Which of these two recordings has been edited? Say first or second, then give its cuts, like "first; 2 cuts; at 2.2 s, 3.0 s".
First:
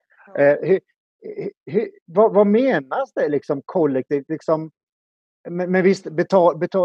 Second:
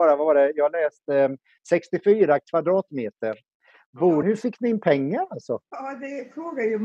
second; 1 cut; at 4.2 s